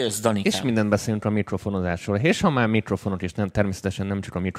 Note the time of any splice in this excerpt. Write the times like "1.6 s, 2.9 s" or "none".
none